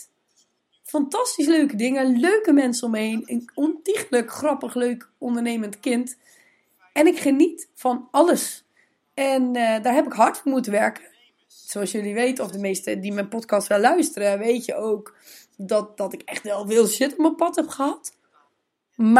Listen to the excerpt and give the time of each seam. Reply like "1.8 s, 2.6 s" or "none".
none